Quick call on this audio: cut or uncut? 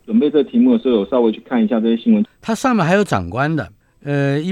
cut